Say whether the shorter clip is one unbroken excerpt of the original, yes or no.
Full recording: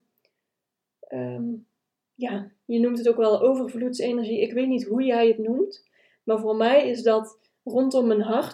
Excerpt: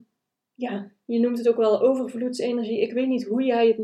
yes